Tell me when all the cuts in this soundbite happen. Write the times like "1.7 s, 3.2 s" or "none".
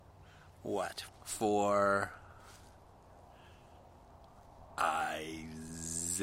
1.1 s